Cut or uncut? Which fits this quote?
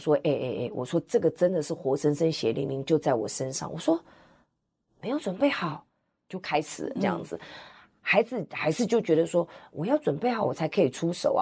uncut